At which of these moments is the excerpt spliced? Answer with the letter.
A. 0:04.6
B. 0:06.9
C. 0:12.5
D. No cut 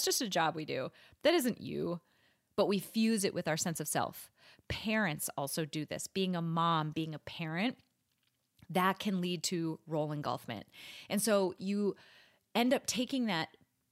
B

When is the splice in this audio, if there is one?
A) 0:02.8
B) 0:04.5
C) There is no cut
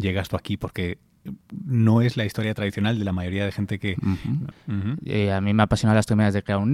B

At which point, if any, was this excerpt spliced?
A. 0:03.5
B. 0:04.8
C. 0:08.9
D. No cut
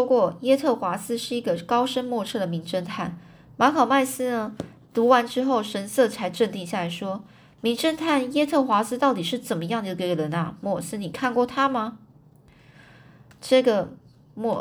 A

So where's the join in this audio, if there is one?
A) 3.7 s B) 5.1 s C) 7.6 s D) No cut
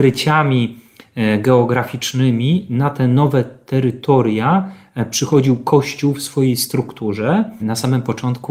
C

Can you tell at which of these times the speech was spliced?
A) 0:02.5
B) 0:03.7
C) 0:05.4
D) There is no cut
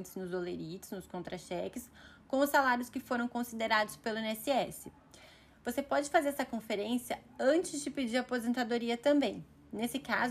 D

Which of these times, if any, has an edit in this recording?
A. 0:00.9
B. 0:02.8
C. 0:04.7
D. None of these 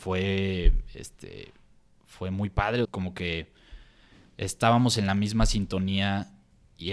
B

